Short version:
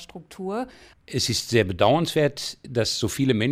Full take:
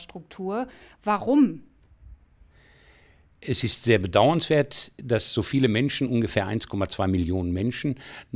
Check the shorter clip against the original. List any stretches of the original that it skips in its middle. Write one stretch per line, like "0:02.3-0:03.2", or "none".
0:00.9-0:03.3